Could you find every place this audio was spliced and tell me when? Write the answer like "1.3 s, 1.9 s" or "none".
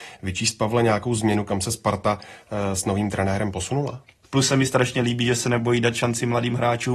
4.2 s